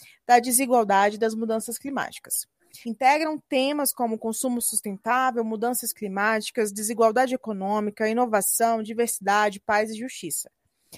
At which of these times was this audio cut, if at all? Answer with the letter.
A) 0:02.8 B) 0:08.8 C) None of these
A